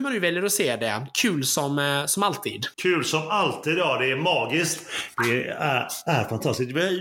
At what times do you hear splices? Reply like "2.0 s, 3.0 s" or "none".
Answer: 2.7 s